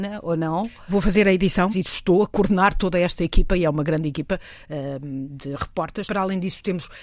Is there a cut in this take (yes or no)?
yes